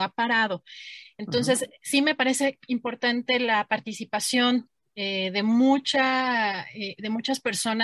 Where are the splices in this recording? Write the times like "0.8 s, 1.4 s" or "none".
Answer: none